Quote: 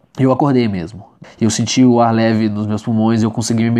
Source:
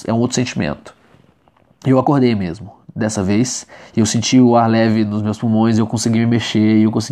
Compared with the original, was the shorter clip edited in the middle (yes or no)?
yes